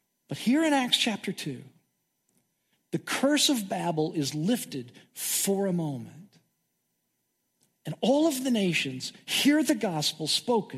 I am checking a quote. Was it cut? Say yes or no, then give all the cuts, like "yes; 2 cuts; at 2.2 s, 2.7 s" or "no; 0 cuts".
yes; 1 cut; at 2.8 s